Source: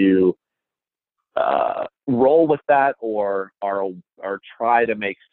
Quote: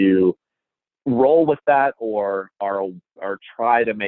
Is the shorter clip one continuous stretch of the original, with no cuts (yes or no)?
no